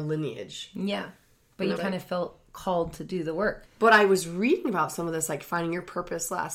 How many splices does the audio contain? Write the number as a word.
two